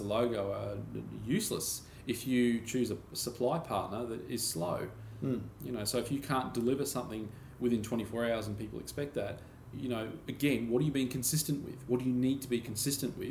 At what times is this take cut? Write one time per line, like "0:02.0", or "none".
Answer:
0:09.7